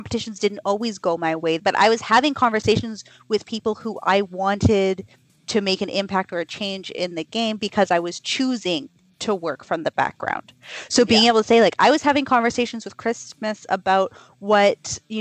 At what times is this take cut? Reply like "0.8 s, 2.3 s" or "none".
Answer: 1.6 s